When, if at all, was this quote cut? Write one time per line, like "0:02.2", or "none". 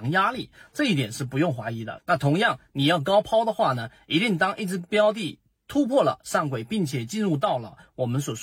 0:02.0